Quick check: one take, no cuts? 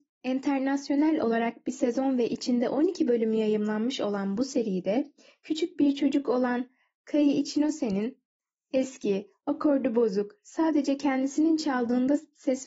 yes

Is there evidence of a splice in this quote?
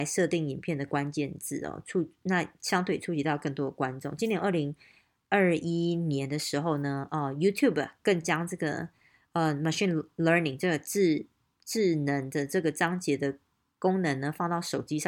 no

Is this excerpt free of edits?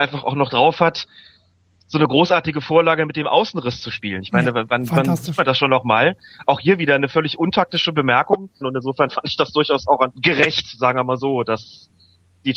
no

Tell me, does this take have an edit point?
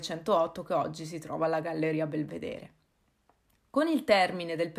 no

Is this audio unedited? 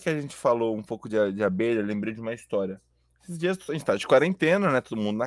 yes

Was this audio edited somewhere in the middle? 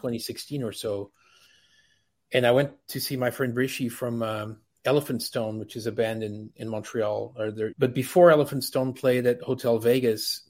yes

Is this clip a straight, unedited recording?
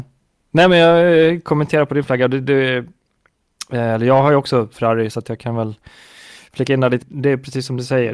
no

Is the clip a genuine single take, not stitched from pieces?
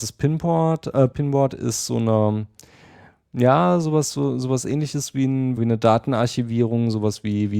no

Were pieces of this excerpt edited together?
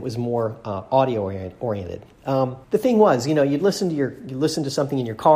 yes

